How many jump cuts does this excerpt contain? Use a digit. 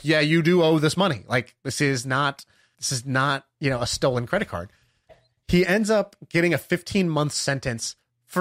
2